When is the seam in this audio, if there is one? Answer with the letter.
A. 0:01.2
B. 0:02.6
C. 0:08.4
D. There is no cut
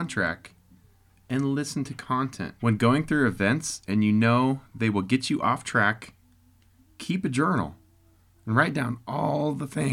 B